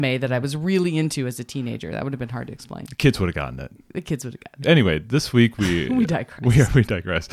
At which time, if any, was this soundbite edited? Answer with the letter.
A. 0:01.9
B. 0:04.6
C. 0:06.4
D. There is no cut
B